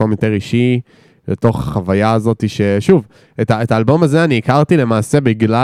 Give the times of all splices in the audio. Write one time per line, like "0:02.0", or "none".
none